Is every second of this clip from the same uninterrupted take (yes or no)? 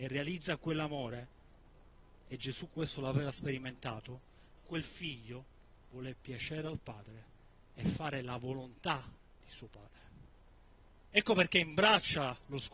no